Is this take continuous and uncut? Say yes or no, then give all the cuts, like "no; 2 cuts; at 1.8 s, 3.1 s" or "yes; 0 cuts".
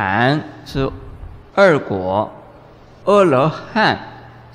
no; 1 cut; at 3.0 s